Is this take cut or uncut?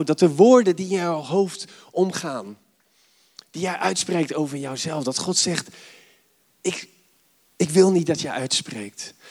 uncut